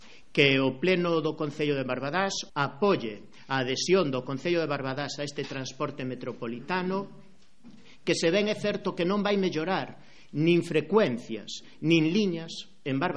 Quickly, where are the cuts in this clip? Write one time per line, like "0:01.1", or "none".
0:02.5